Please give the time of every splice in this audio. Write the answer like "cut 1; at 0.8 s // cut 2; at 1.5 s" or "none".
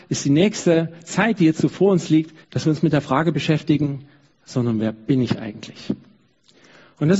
cut 1; at 2.4 s // cut 2; at 4.3 s